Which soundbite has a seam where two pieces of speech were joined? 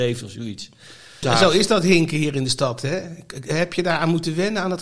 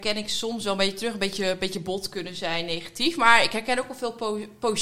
first; 1 cut; at 1.2 s

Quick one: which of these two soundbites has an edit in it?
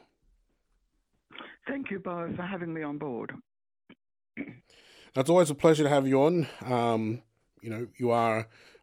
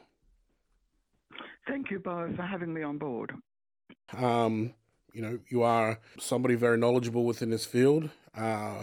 second; 2 cuts; at 4.1 s, 6.2 s

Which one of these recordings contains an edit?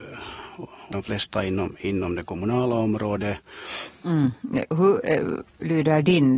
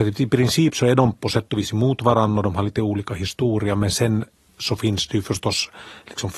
first; 2 cuts; at 0.9 s, 3.9 s

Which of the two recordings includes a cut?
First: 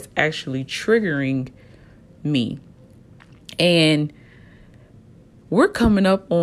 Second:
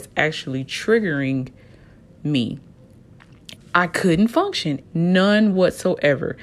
second; 2 cuts; at 3.6 s, 4.8 s

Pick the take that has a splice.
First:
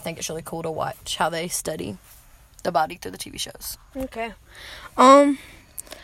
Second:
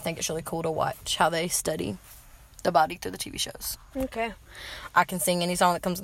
second; 1 cut; at 4.9 s

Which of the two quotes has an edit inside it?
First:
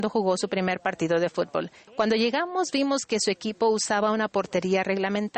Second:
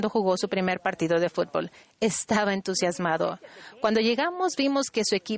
first; 1 cut; at 1.9 s

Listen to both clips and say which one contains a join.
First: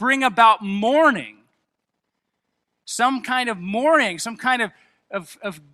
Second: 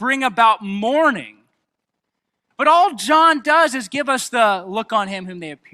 second; 1 cut; at 2.5 s

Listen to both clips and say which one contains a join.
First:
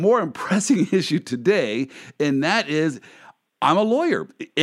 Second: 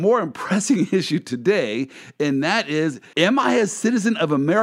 second; 1 cut; at 3.1 s

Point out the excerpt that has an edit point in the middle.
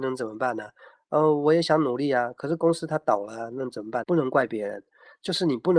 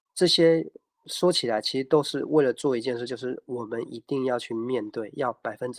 first; 1 cut; at 4.0 s

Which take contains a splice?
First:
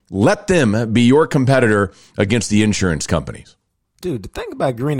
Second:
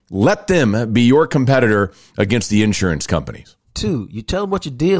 second; 1 cut; at 3.6 s

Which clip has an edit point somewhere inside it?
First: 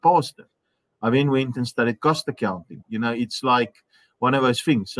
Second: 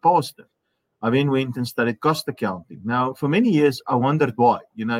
first; 1 cut; at 2.8 s

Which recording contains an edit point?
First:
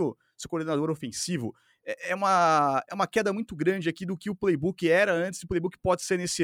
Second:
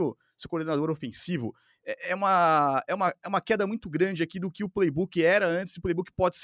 first; 1 cut; at 2.9 s

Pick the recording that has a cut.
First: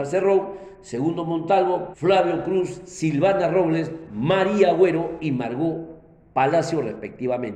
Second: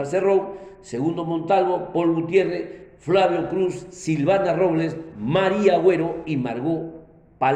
first; 1 cut; at 1.9 s

